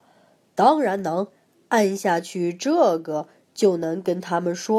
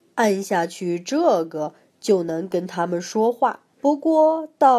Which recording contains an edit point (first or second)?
second